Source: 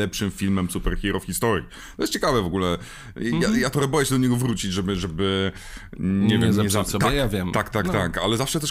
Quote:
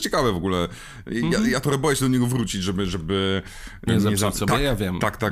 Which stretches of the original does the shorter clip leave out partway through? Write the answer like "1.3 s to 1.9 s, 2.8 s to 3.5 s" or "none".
6.0 s to 6.4 s